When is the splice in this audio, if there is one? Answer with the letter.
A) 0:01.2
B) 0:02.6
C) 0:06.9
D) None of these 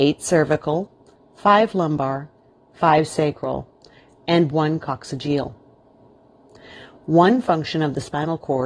A